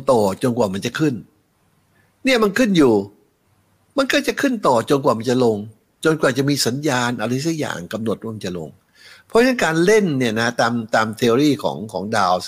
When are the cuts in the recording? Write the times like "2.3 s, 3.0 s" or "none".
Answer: none